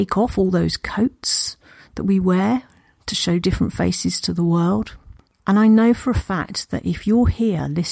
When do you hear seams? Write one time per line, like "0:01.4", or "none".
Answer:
0:05.3